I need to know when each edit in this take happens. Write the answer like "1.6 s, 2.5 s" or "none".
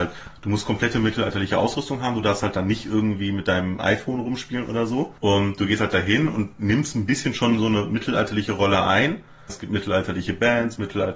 5.2 s, 9.5 s